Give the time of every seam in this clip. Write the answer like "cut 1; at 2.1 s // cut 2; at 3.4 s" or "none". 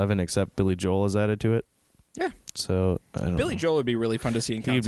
none